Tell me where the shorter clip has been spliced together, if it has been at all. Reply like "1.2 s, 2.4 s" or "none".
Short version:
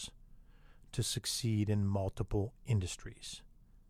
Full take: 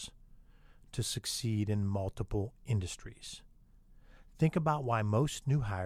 none